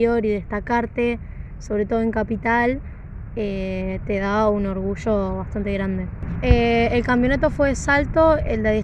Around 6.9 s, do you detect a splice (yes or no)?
no